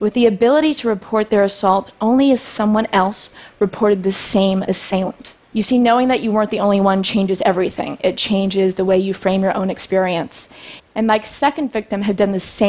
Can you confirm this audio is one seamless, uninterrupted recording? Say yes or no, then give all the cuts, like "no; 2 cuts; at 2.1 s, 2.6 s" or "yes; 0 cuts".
no; 2 cuts; at 5.4 s, 10.8 s